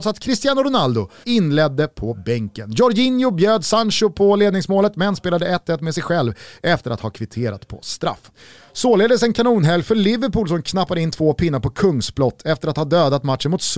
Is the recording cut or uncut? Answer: cut